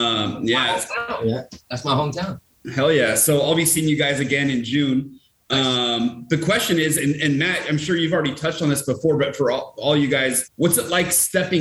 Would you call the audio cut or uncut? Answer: cut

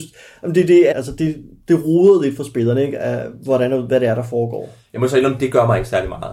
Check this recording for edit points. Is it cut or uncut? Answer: cut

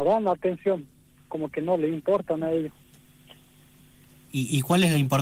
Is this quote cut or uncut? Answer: uncut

